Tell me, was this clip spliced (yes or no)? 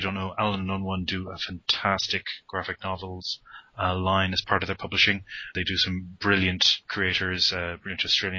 no